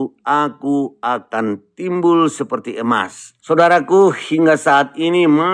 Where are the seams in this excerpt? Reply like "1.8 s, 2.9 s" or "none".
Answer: 3.4 s